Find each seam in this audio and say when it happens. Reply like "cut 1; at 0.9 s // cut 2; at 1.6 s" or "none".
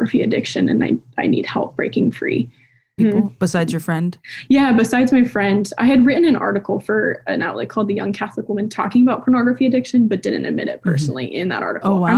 cut 1; at 3.0 s